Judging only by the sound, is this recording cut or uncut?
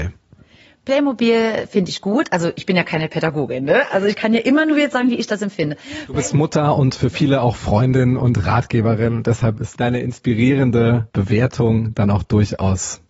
uncut